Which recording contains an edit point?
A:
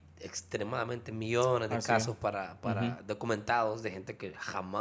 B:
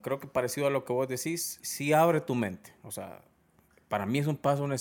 B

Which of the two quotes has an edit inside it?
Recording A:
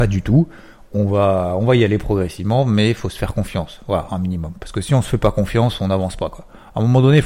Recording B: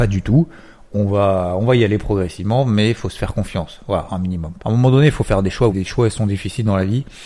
B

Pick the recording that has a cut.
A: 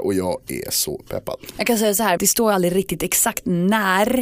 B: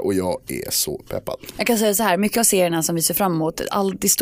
A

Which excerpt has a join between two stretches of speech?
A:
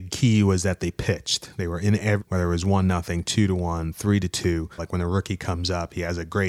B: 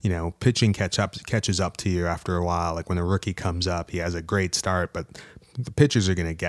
A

